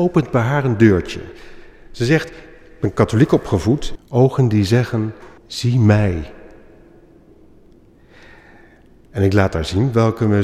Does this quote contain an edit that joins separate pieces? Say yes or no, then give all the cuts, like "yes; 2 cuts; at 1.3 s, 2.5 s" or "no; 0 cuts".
yes; 2 cuts; at 4.0 s, 5.4 s